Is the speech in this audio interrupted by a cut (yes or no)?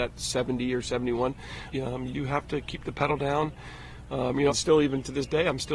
yes